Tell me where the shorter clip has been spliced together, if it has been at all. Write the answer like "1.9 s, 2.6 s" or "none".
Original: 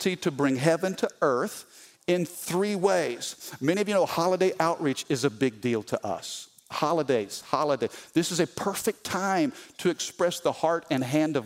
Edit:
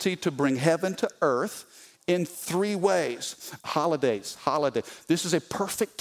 3.6 s